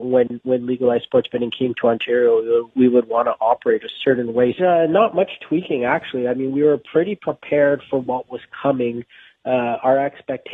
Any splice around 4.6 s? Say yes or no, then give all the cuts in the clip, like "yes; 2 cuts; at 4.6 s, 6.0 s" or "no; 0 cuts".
yes; 1 cut; at 4.6 s